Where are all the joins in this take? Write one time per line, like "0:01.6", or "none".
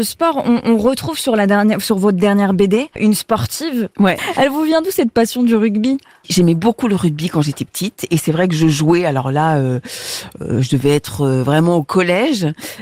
0:04.2